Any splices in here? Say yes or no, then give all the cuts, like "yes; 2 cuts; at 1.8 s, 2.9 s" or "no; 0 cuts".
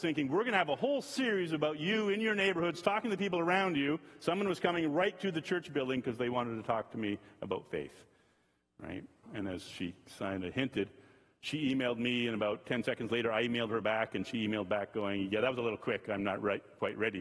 yes; 1 cut; at 9.2 s